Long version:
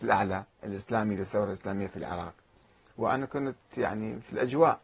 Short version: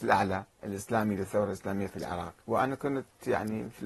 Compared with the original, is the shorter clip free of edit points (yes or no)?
no